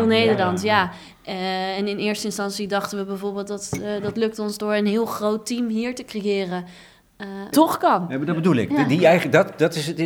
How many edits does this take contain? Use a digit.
1